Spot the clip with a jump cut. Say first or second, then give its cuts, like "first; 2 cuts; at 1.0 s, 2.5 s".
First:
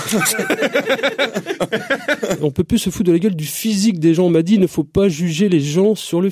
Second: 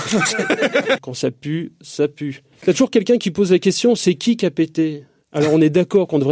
second; 2 cuts; at 1.0 s, 2.6 s